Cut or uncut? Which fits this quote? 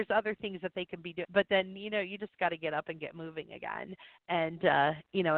cut